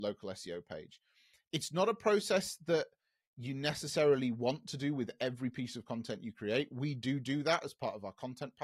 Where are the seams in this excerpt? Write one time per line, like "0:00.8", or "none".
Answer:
none